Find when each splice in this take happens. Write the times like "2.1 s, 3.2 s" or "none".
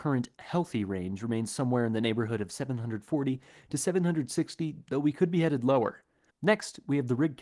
6.3 s